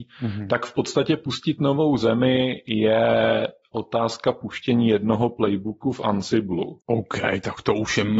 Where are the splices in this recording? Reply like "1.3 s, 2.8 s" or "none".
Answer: 6.8 s